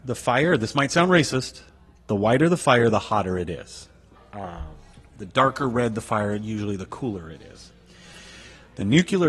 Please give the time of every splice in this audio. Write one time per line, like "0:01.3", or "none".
0:04.2